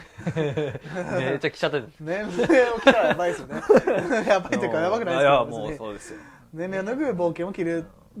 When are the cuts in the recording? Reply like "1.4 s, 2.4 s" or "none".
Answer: none

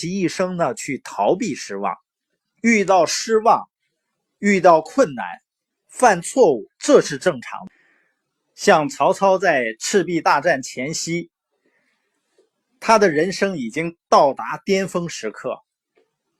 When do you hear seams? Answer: 2.4 s

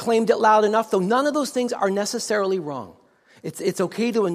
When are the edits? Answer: none

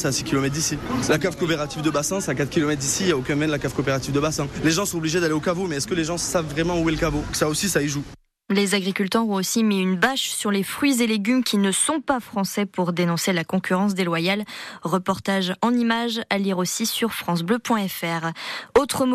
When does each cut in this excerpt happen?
7.3 s

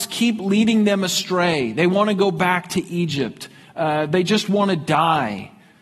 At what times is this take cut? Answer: none

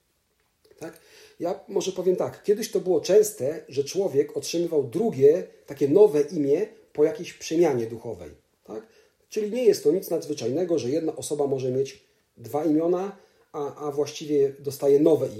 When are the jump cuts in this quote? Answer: none

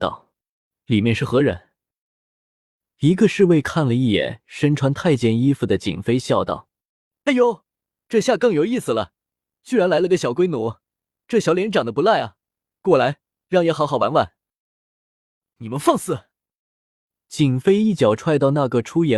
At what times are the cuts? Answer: none

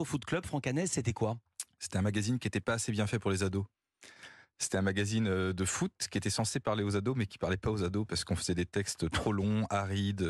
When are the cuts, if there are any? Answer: none

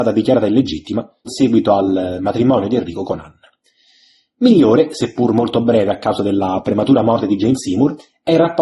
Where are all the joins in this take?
1.3 s

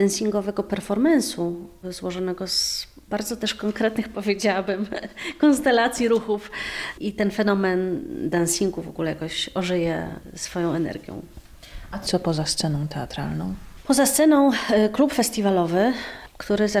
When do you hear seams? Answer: none

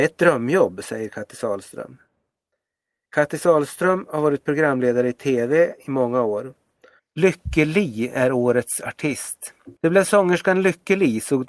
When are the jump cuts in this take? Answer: 7.0 s, 9.8 s

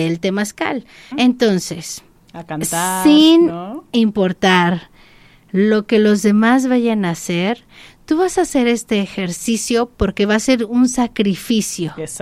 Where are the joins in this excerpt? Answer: 1.1 s

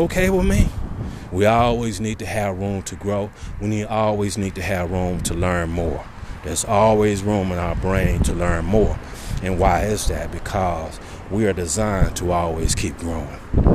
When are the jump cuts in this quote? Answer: 1.3 s

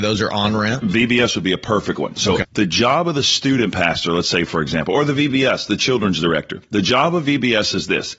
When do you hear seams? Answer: 2.4 s

